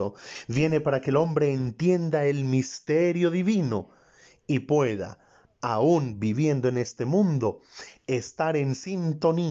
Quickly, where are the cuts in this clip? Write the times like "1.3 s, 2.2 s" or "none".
none